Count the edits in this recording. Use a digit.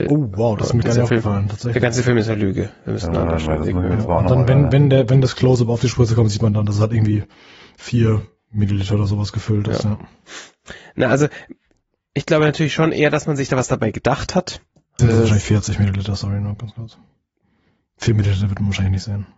1